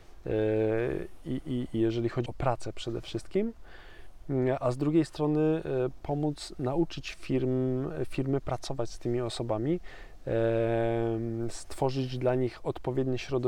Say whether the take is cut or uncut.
cut